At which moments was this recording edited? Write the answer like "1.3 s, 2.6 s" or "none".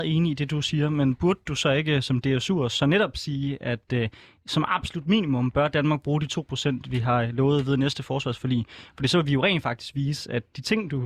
none